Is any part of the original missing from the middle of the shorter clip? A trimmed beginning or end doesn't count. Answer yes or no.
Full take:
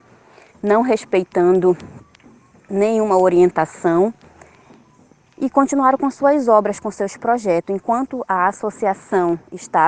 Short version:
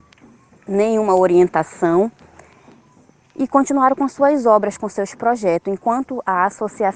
no